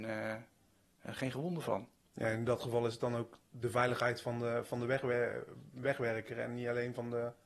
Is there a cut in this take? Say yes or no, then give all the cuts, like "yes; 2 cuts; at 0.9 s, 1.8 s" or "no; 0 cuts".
no; 0 cuts